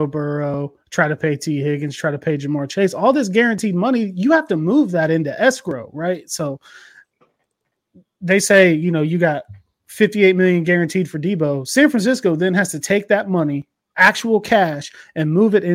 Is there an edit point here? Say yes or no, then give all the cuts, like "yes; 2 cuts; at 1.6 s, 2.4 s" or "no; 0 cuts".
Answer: no; 0 cuts